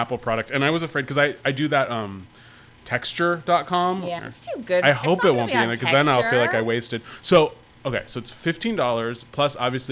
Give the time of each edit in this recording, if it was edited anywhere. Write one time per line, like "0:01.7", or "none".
0:04.2